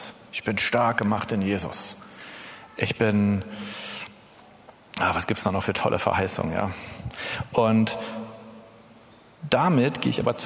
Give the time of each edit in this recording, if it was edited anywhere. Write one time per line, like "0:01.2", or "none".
none